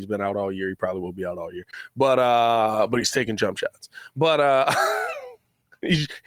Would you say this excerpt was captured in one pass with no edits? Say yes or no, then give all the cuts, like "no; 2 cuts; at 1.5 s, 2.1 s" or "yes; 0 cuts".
yes; 0 cuts